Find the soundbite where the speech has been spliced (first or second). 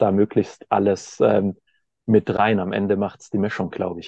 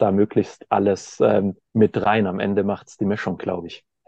second